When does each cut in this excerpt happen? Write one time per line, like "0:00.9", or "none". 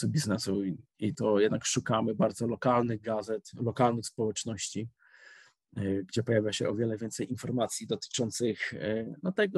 0:01.1